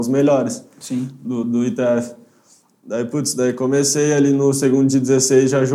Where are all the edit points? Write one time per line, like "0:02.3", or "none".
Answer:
none